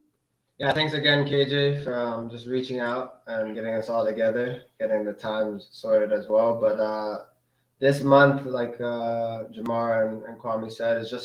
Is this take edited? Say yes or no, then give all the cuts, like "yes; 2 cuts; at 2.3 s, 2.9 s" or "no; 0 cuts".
yes; 1 cut; at 3.5 s